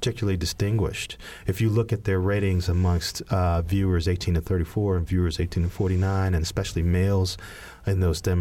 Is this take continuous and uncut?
yes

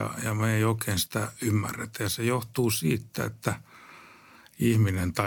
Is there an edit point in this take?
no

